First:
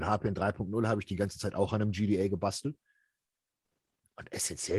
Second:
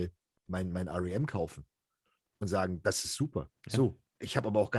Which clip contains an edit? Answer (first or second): second